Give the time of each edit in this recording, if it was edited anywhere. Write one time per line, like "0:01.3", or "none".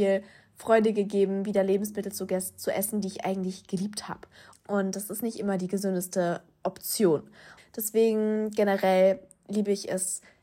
0:04.5
0:07.6